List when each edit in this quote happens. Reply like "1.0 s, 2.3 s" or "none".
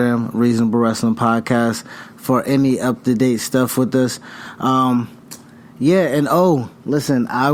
none